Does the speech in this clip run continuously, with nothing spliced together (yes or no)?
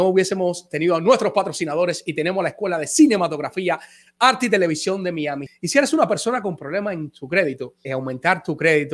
no